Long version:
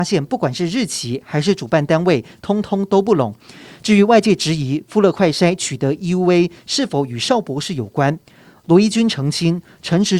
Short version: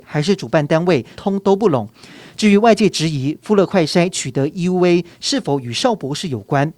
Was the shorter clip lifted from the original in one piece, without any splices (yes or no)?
no